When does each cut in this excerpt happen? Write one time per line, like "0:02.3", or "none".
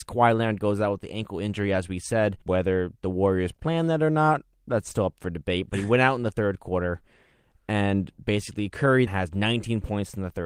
0:02.4
0:09.1